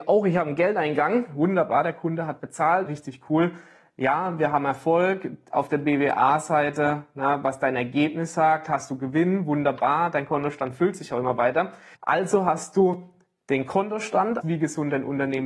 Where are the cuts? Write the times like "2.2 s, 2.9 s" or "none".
2.9 s, 11.9 s, 14.4 s